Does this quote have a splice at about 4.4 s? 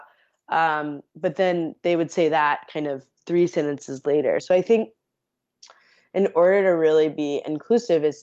yes; 1 cut; at 4.4 s

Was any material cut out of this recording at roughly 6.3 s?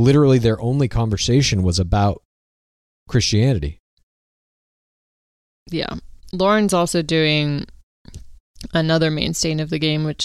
yes; 1 cut; at 6.3 s

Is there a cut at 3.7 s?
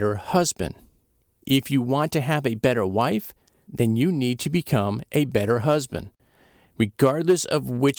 yes; 1 cut; at 3.7 s

